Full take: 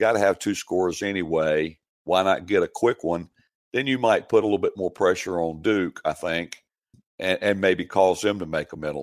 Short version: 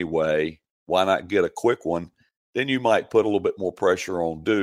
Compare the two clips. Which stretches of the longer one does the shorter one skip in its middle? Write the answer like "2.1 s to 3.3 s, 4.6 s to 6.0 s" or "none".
none